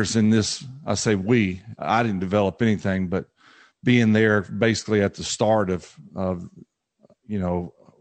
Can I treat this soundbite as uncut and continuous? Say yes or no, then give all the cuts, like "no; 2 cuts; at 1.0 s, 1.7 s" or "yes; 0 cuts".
yes; 0 cuts